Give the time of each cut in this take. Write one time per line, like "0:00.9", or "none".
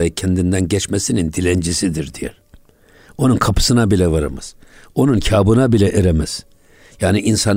none